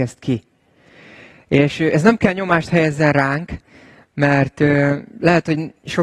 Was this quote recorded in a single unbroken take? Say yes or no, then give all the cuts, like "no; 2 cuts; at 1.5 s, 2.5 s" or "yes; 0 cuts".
yes; 0 cuts